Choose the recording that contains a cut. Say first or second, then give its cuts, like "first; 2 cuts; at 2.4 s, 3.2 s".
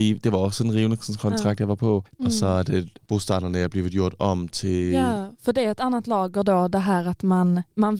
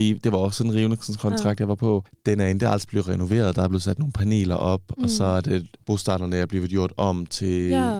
first; 1 cut; at 2.2 s